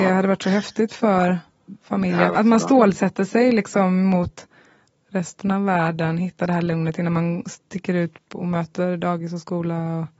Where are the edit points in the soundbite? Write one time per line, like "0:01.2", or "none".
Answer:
0:02.3